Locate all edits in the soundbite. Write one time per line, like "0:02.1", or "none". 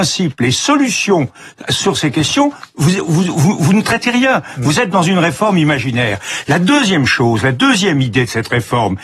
none